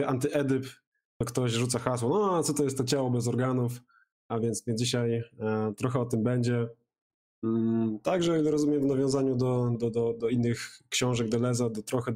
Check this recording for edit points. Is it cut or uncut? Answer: cut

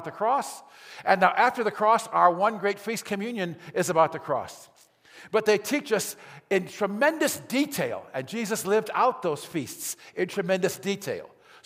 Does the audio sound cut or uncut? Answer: uncut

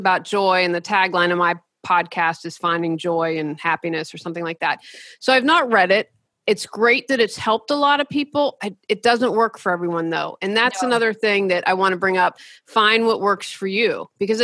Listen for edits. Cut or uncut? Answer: uncut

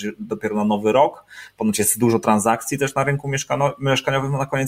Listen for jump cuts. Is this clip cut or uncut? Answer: uncut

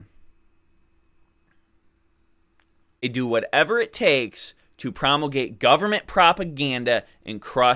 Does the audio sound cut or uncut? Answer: uncut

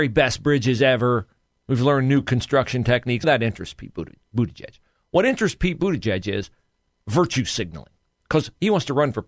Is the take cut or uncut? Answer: cut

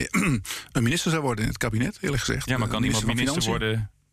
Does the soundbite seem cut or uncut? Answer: uncut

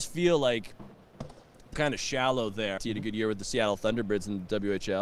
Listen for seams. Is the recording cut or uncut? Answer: cut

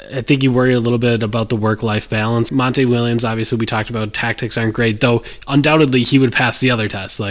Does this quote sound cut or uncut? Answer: cut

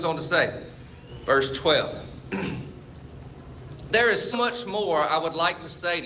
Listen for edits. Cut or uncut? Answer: cut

